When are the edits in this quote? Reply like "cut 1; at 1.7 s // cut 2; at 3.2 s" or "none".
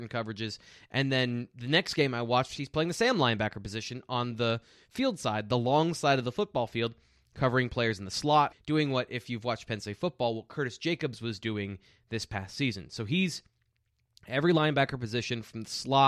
cut 1; at 8.5 s